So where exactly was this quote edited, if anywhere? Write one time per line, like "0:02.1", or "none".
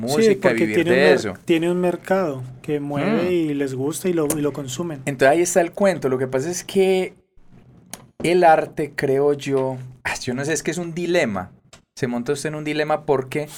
none